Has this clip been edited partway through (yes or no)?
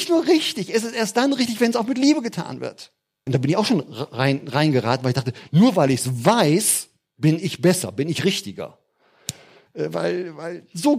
yes